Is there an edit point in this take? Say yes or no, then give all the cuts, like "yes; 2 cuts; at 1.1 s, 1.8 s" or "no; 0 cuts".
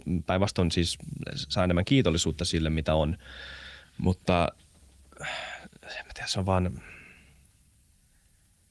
no; 0 cuts